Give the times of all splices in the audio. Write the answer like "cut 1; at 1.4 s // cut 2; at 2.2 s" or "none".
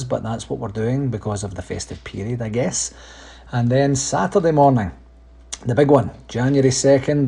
none